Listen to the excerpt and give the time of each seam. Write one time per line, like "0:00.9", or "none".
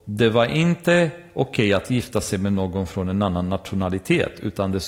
none